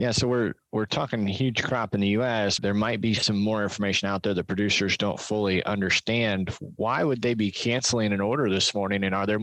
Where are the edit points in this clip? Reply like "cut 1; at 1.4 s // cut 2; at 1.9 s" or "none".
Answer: cut 1; at 2.6 s